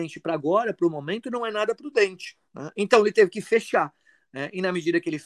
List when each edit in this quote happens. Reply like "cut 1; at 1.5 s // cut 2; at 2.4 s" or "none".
none